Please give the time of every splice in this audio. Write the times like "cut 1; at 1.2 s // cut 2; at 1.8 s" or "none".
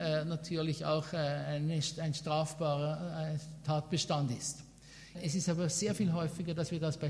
cut 1; at 5.1 s